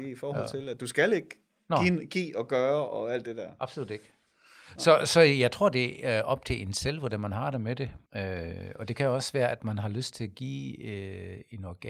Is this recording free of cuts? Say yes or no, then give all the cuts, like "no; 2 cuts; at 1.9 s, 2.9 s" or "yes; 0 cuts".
no; 1 cut; at 8.1 s